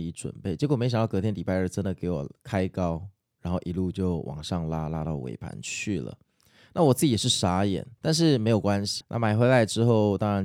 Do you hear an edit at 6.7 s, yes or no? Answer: no